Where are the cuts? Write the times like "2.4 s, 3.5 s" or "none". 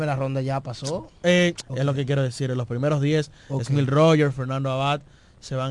1.6 s

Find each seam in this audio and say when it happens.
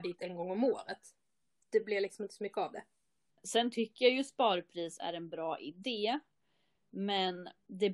3.3 s

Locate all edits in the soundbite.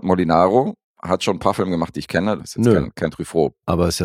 2.4 s

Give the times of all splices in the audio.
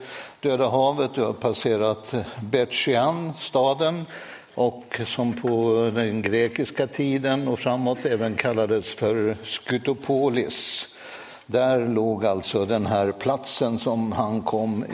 none

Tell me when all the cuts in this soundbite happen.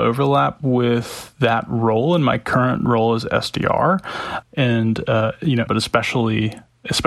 4.4 s, 5.7 s

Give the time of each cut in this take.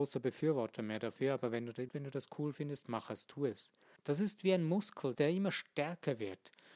1.9 s, 4.0 s, 5.1 s

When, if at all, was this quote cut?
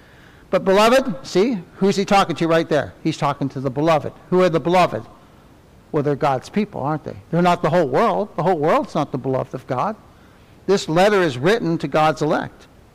1.2 s

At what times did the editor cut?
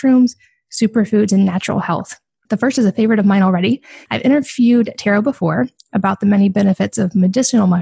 2.5 s, 4.1 s

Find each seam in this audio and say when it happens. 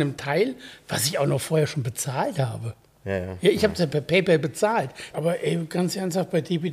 5.1 s

